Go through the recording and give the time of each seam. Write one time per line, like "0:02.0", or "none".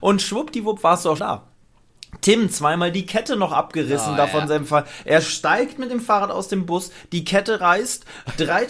0:01.2